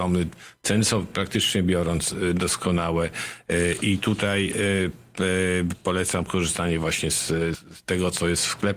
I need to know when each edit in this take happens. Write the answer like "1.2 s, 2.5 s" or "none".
7.5 s